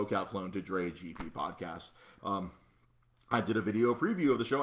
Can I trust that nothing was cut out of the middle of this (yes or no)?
no